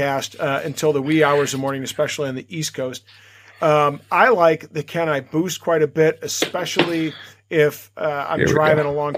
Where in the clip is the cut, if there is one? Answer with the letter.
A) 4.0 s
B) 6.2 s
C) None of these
C